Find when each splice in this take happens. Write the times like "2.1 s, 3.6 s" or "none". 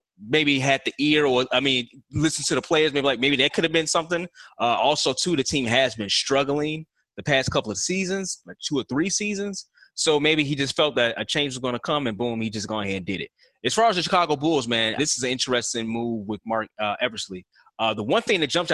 15.0 s